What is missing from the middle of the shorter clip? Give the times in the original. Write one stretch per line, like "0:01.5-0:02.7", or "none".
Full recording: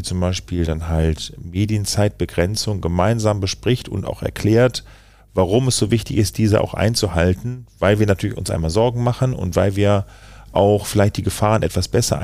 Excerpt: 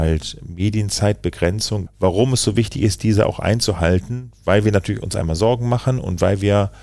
0:02.8-0:05.2